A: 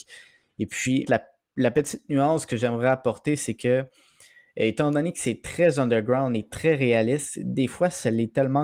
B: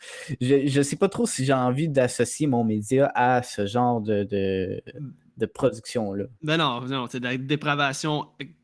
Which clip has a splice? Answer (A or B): A